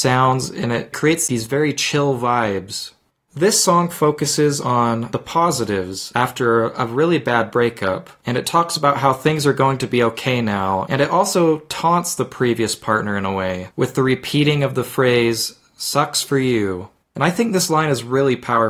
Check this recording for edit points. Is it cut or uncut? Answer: cut